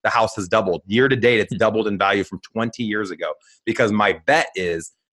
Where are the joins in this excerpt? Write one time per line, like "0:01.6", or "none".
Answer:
none